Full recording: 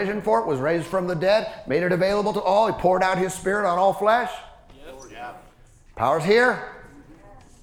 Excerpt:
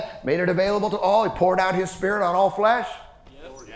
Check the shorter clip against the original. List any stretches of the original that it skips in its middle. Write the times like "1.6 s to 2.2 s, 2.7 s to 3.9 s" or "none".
none